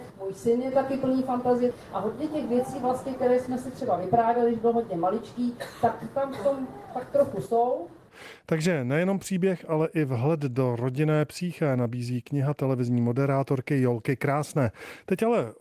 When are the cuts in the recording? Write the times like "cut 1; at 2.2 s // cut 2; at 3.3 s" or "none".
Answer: none

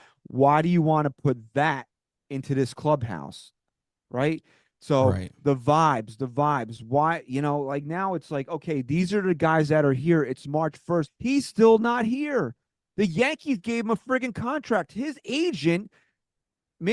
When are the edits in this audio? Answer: cut 1; at 11.1 s

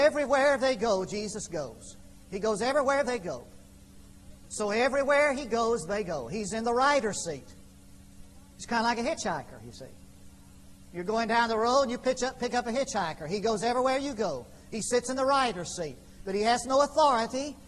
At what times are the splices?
cut 1; at 4.5 s

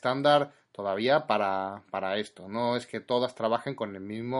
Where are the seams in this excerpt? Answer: none

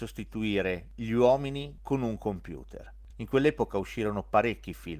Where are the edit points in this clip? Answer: cut 1; at 3.1 s

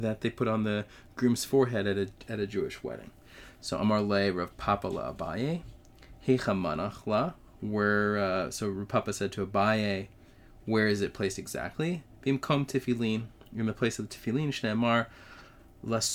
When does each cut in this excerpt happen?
none

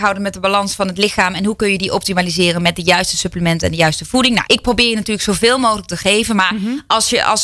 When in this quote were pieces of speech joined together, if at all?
cut 1; at 4.5 s

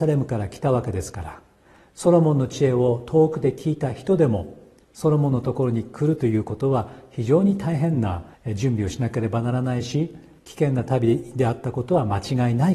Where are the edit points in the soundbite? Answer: cut 1; at 8.3 s

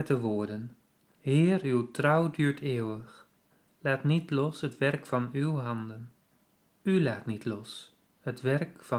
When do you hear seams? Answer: cut 1; at 6.8 s

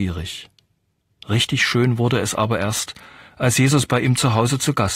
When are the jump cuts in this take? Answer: none

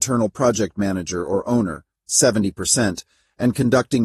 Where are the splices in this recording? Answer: none

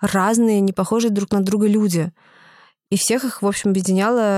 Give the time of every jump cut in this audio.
none

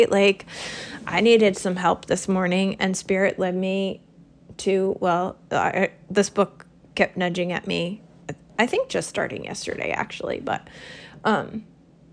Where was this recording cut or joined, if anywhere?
none

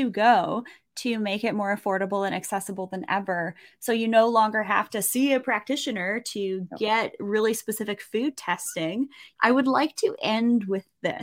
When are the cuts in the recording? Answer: cut 1; at 9.4 s

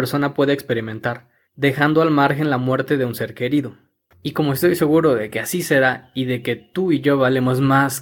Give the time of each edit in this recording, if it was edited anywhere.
cut 1; at 4.1 s

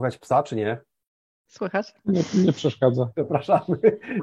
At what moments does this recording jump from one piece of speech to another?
none

